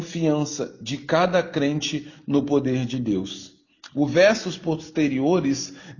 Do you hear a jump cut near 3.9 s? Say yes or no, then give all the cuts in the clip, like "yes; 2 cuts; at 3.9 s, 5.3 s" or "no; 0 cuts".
yes; 1 cut; at 3.9 s